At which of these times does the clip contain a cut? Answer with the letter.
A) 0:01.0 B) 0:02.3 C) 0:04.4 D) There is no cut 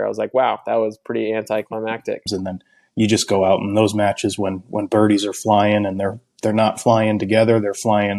B